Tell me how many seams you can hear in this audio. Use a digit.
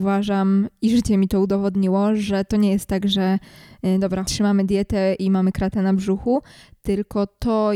1